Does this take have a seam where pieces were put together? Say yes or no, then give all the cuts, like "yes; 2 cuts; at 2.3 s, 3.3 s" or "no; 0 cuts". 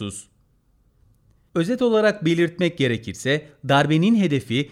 yes; 1 cut; at 1.5 s